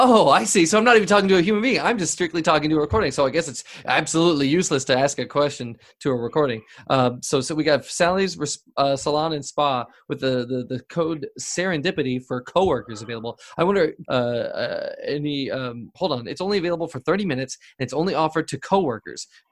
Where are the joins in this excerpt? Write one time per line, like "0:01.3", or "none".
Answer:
0:14.0
0:15.9